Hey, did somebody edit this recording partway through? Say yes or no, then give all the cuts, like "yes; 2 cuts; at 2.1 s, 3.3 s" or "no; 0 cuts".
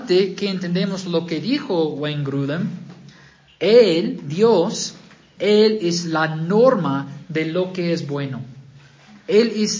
yes; 1 cut; at 5.4 s